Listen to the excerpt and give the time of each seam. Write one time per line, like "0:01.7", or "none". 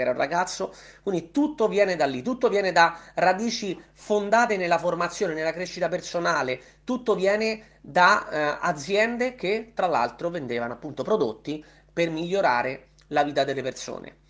none